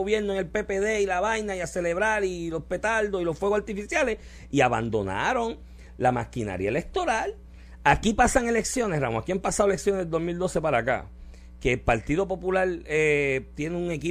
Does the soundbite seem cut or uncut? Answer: uncut